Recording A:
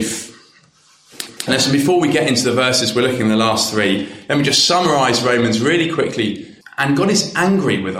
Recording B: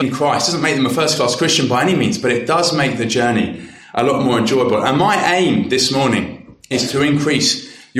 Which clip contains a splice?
A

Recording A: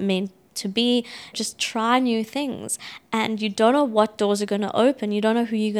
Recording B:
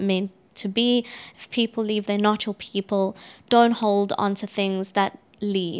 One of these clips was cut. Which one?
A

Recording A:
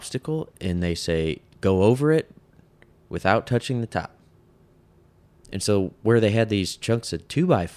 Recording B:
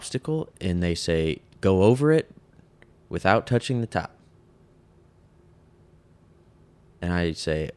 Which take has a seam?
A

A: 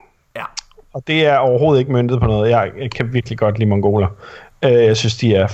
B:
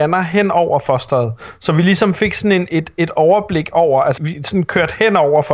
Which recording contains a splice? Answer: B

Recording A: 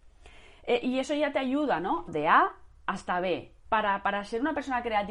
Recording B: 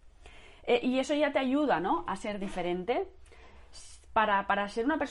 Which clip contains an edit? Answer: A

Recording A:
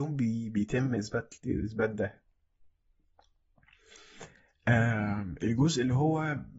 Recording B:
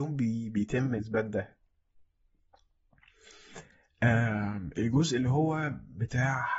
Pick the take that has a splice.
B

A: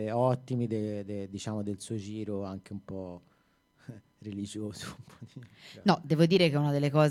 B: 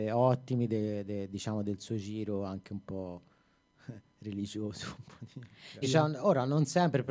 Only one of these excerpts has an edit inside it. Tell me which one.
B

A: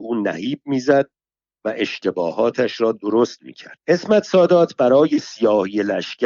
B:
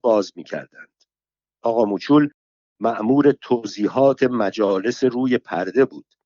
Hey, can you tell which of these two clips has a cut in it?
A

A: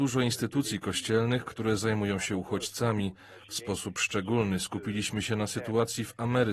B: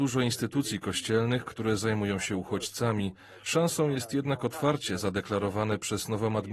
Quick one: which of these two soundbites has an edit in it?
B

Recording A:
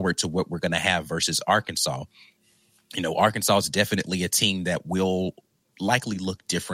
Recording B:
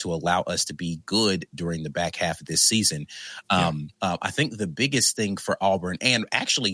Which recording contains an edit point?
B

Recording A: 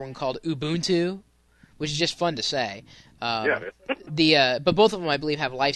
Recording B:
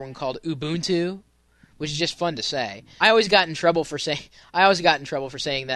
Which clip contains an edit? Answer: B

